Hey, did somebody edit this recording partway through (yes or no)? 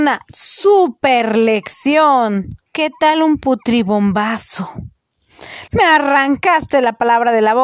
yes